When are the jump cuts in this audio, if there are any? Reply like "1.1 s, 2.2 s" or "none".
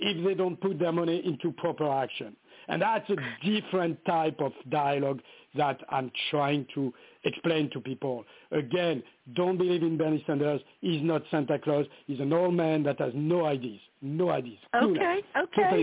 none